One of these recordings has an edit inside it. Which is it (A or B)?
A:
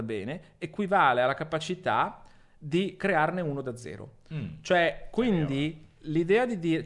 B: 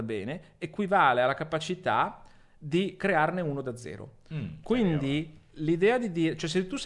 B